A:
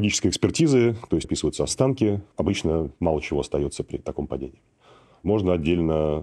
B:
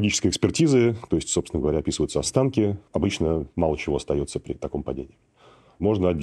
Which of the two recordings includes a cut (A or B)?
A